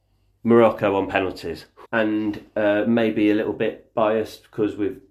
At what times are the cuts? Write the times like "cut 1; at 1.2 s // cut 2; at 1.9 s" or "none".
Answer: cut 1; at 1.9 s